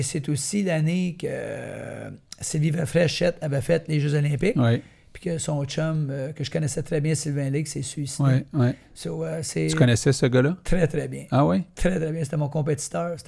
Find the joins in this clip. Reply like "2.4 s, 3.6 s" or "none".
none